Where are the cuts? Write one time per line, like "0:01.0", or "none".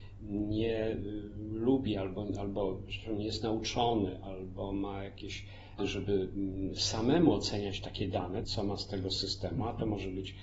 0:05.8
0:08.4